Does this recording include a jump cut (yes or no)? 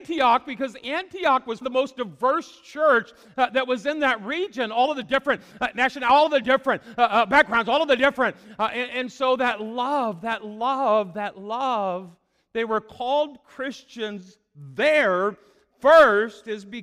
yes